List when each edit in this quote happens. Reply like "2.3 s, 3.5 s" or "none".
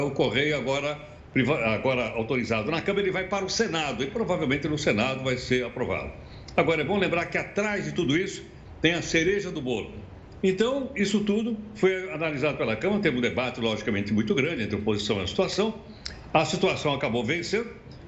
10.4 s